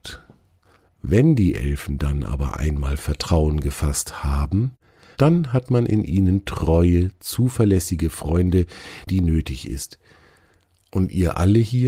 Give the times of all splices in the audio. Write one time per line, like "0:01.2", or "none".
0:09.1